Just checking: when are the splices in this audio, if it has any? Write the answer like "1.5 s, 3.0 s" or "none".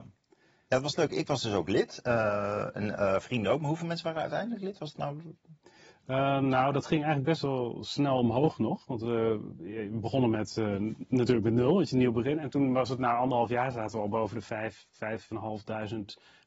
none